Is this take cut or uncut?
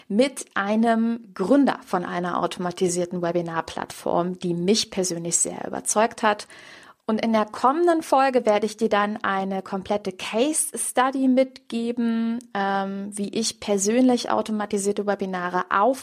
cut